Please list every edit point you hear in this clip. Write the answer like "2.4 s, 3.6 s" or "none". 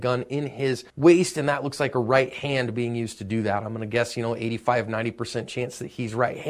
0.9 s